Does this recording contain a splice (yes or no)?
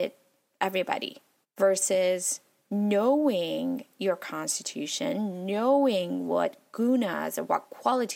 yes